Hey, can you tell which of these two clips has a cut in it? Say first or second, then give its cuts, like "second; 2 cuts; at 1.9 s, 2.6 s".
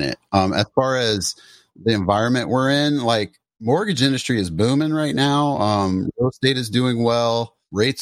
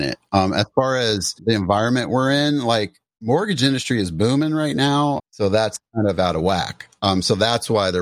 second; 2 cuts; at 1.4 s, 5.2 s